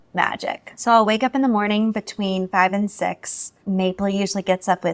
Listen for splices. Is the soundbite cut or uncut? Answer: uncut